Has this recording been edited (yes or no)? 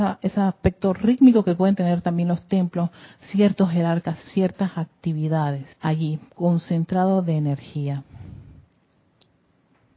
yes